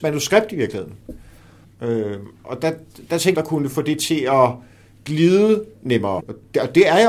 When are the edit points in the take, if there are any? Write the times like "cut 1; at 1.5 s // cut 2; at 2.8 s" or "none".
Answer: cut 1; at 1.6 s // cut 2; at 3.3 s // cut 3; at 6.2 s